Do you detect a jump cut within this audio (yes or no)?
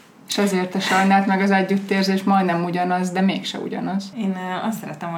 yes